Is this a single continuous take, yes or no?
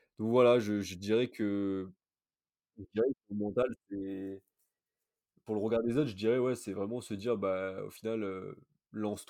yes